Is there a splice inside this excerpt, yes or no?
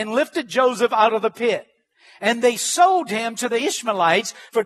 no